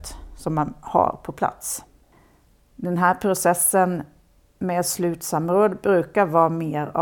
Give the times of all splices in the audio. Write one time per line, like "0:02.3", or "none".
0:02.6